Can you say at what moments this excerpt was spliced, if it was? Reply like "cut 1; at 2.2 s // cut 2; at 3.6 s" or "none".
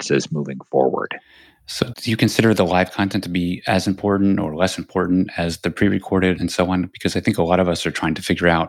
cut 1; at 1.9 s // cut 2; at 6.4 s